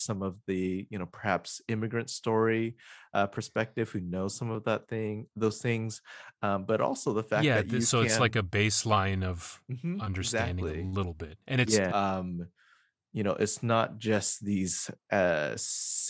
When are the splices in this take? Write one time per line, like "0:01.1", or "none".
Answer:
0:11.9